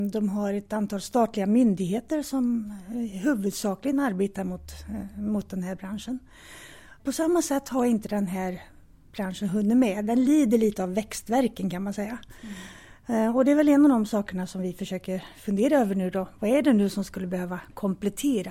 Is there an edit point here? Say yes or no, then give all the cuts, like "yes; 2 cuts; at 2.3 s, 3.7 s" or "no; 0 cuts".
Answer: no; 0 cuts